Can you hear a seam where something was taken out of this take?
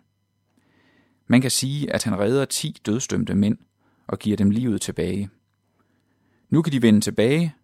no; 0 cuts

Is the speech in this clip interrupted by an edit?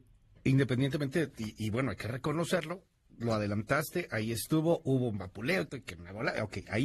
yes; 1 cut; at 5.7 s

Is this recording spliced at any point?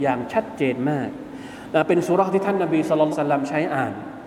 yes; 1 cut; at 3.1 s

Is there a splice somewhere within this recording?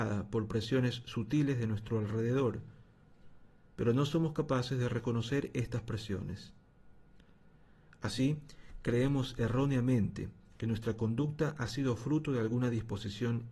no; 0 cuts

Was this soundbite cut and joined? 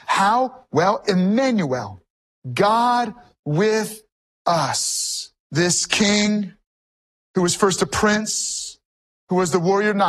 no; 0 cuts

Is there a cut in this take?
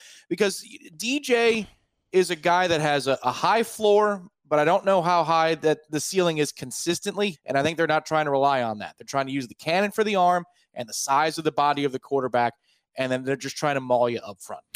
yes; 1 cut; at 7.3 s

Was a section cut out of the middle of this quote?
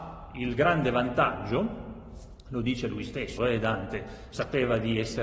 yes; 1 cut; at 3.4 s

